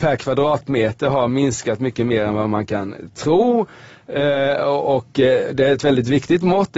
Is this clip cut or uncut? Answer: uncut